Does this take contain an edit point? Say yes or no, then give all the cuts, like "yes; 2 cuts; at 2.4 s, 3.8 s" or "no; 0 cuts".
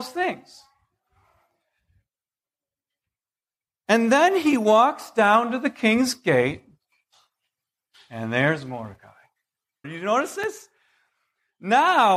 yes; 1 cut; at 9.8 s